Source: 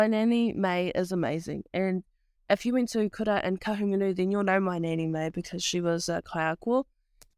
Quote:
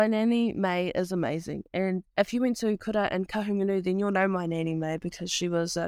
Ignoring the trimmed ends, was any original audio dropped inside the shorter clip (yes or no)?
yes